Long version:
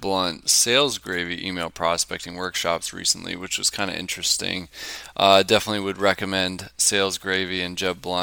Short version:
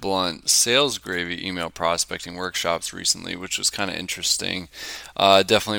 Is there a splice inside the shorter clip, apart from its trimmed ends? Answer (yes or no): no